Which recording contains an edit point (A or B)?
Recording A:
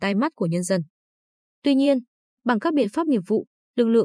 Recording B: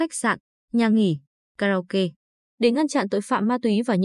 B